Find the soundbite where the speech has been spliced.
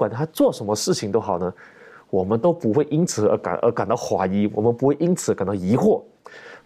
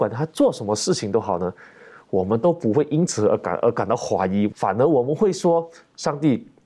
second; 1 cut; at 4.5 s

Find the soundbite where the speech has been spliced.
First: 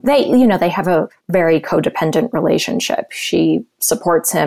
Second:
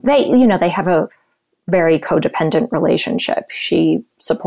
first; 1 cut; at 1.2 s

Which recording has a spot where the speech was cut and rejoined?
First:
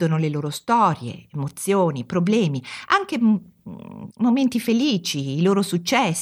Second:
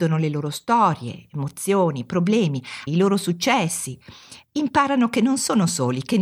second; 1 cut; at 2.9 s

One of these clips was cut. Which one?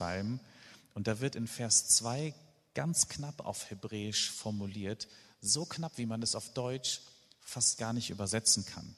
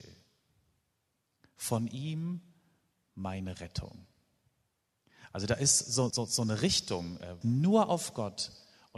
second; 2 cuts; at 6.1 s, 7.4 s

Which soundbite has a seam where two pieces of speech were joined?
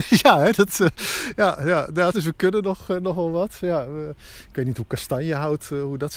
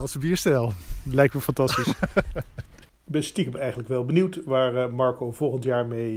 first; 1 cut; at 2.1 s

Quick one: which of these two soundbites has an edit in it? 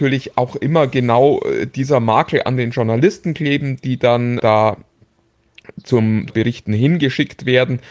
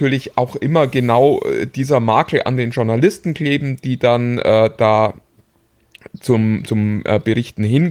first; 2 cuts; at 4.4 s, 6.3 s

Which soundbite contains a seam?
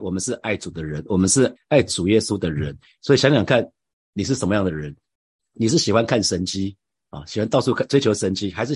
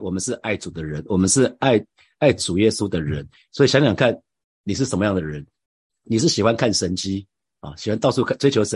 first; 1 cut; at 1.6 s

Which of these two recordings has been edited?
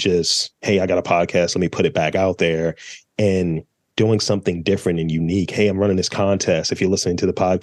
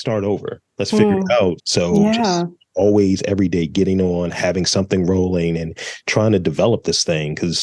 second; 1 cut; at 1.6 s

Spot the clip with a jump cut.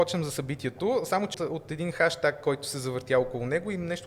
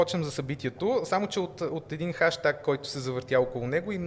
first; 1 cut; at 1.3 s

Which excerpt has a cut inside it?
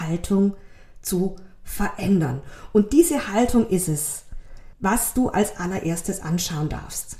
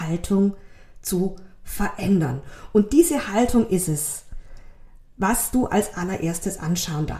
first; 1 cut; at 4.7 s

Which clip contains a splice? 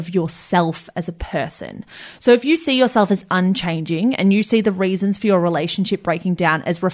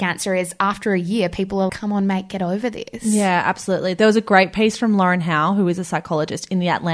second; 1 cut; at 1.7 s

